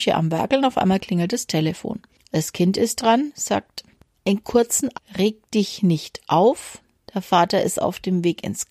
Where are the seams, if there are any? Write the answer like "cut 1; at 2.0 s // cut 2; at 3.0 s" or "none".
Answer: cut 1; at 4.9 s